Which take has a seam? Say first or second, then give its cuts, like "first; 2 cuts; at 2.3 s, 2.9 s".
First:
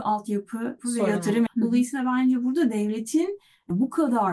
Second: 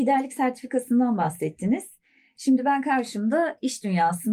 first; 1 cut; at 1.5 s